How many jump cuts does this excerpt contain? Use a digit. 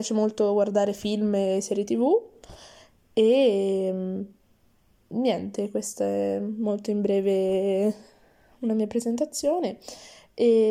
0